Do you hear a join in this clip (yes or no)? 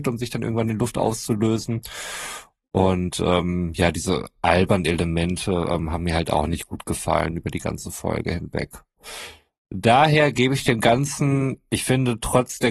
no